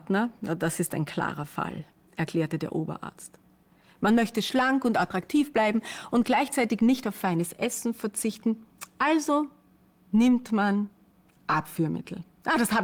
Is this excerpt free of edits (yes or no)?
yes